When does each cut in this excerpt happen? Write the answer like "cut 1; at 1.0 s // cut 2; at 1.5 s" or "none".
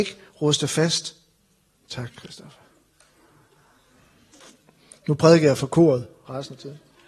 cut 1; at 1.7 s